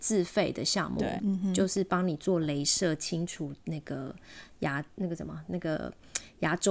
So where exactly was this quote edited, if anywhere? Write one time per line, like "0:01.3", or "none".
0:01.2